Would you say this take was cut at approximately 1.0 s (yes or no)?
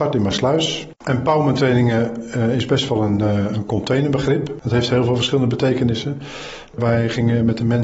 yes